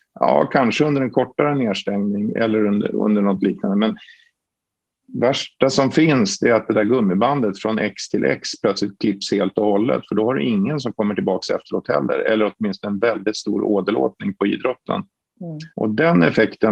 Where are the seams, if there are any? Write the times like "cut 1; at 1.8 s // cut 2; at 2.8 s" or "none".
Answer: cut 1; at 15.7 s